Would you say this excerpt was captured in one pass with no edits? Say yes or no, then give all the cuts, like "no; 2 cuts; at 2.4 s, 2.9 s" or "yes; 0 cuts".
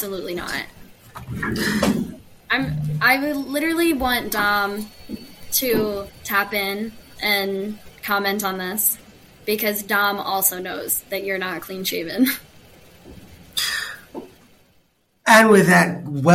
no; 1 cut; at 6.2 s